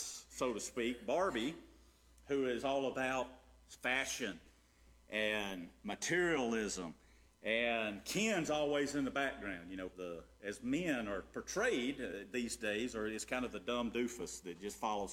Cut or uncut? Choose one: cut